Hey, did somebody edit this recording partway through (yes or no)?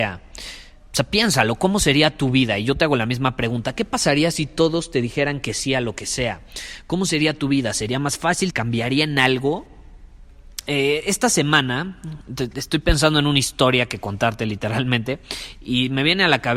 yes